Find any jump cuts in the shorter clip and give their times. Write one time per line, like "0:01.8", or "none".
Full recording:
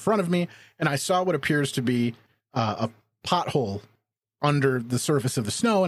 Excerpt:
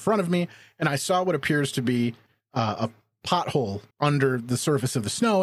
0:03.9